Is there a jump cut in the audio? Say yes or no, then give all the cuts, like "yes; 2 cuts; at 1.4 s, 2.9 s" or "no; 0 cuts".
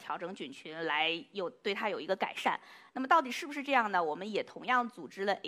no; 0 cuts